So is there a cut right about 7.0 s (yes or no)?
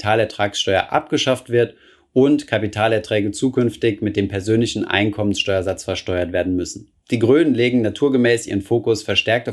yes